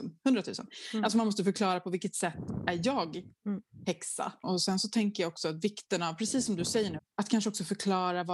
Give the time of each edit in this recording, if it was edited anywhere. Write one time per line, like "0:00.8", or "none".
0:04.4
0:07.0